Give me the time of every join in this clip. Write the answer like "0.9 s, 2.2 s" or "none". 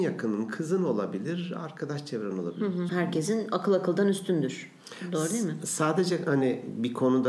2.9 s

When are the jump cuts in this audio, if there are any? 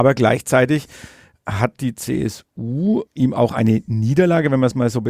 3.1 s

